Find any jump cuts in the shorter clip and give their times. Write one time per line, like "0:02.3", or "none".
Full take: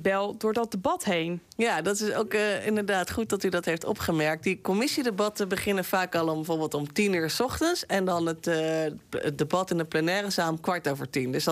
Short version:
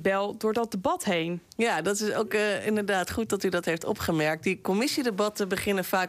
none